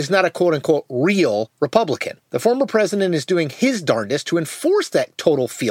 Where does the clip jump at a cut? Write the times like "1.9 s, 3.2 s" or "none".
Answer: 2.2 s